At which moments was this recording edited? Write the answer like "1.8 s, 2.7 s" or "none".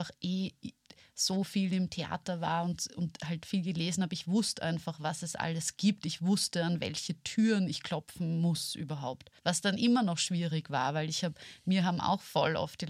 9.4 s